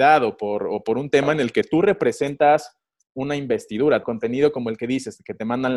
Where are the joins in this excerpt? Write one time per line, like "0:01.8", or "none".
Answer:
0:04.0